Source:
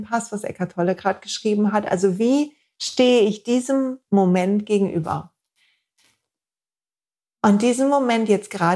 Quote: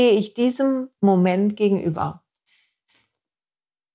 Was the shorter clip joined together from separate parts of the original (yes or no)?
no